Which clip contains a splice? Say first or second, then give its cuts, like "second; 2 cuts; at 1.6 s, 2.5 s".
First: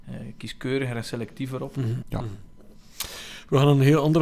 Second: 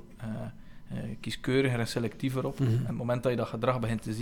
first; 1 cut; at 2.0 s